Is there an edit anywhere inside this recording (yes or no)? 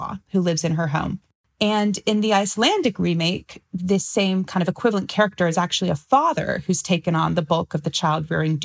no